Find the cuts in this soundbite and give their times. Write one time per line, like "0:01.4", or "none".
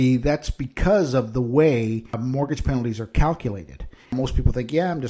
0:04.0